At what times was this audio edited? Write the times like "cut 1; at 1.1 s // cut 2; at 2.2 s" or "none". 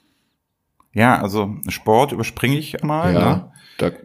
cut 1; at 1.2 s // cut 2; at 2.8 s